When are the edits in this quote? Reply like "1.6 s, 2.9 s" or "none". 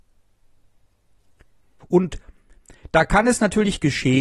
1.8 s